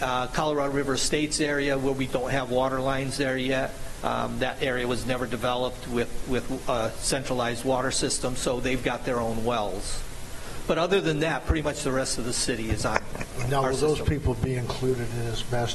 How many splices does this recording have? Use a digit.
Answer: 1